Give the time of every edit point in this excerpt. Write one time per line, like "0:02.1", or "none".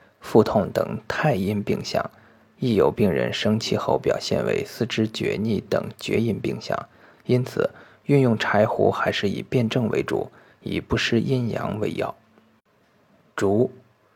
none